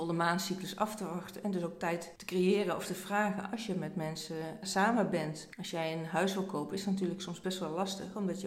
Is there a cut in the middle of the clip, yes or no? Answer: no